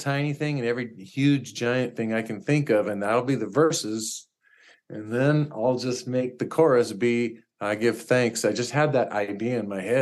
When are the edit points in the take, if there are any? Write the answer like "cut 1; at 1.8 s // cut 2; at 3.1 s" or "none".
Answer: none